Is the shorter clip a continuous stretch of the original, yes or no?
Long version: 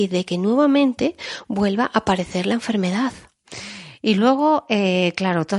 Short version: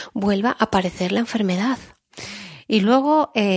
yes